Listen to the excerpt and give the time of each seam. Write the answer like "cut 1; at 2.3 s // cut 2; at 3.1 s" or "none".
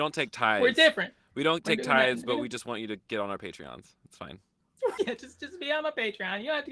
cut 1; at 5.0 s